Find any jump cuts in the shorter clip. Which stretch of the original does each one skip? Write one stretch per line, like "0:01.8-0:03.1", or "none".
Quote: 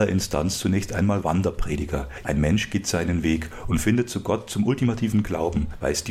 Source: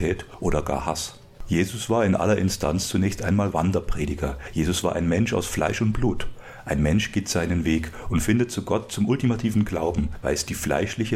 0:04.5-0:06.6